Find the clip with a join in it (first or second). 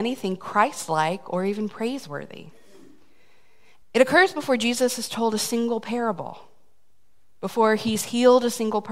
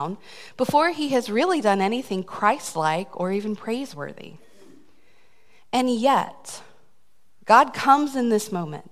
first